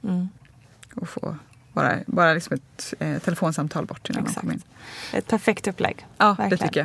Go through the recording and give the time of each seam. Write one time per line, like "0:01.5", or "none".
none

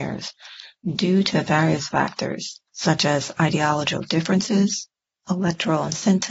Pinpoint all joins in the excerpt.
0:02.7
0:05.2

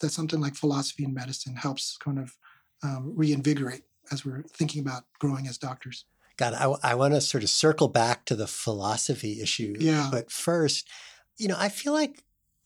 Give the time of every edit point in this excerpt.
none

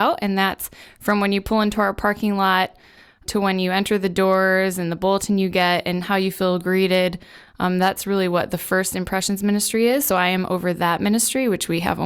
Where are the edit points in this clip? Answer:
none

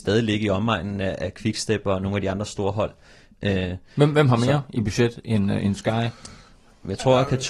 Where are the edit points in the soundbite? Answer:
0:03.3

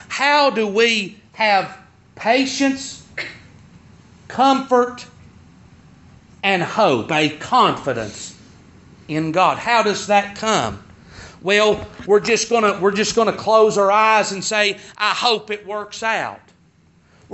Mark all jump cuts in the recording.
none

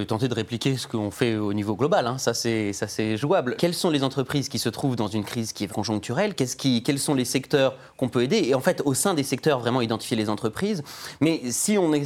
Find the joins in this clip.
0:03.6
0:05.7

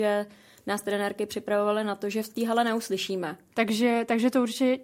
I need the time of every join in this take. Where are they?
0:03.5

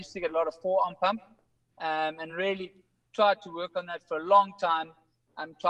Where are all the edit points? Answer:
none

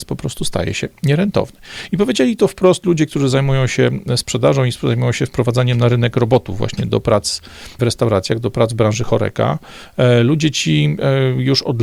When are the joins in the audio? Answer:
0:07.8

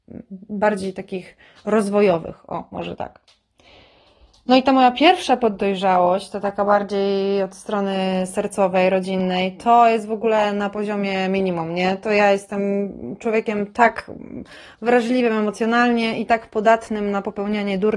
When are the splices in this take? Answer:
none

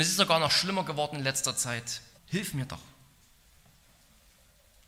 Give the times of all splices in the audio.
0:02.2

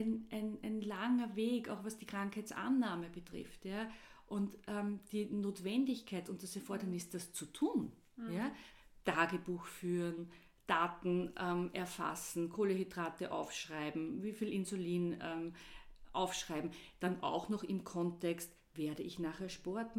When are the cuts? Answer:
none

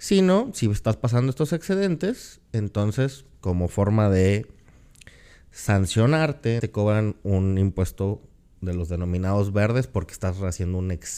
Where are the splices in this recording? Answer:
0:06.6

